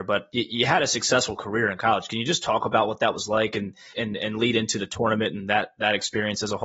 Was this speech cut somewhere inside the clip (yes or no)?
yes